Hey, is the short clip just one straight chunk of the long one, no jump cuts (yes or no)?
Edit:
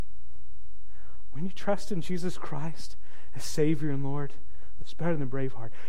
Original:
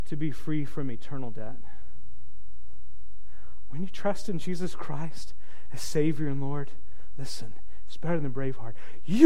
no